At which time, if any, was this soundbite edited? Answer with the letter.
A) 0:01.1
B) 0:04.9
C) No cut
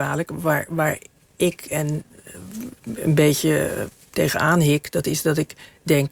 C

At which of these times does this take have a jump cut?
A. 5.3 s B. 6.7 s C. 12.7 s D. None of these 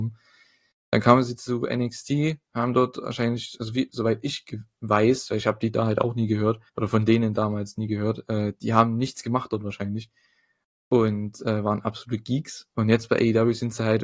B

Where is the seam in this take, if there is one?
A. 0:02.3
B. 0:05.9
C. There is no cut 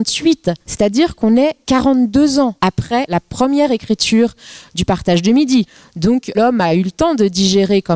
C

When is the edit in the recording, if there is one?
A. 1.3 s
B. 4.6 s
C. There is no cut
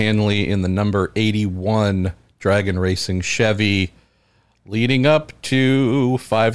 C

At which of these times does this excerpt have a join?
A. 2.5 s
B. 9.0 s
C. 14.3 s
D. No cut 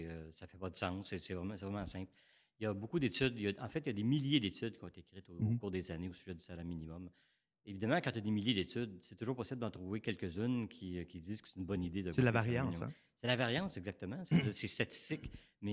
D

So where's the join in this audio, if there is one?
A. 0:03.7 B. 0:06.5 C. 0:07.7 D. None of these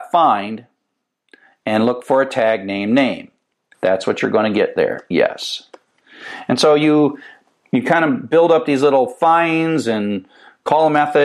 A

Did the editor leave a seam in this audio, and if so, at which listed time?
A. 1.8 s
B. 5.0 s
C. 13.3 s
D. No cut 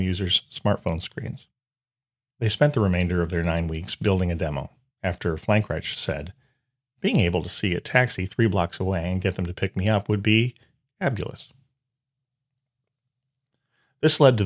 B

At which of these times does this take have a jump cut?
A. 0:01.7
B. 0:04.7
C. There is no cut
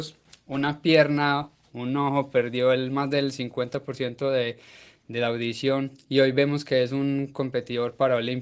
C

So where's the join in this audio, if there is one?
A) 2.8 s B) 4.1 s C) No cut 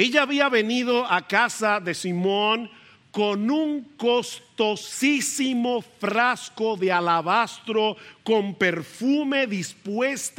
C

